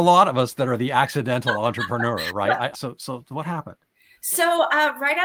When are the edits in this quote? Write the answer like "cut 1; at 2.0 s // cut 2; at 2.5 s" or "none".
cut 1; at 2.7 s